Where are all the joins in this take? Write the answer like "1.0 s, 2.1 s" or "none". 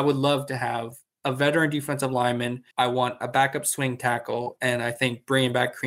2.7 s